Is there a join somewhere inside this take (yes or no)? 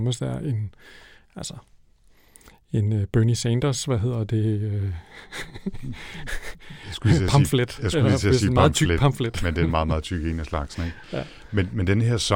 no